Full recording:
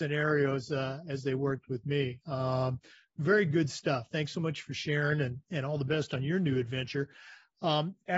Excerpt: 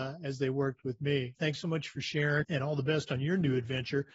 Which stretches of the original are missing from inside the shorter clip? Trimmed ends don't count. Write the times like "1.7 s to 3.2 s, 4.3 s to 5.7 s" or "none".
2.2 s to 4.1 s, 5.1 s to 5.4 s